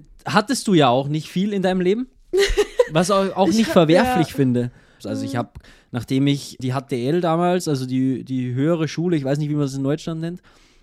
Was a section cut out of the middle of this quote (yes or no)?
yes